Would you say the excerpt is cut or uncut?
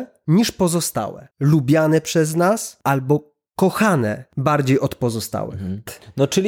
cut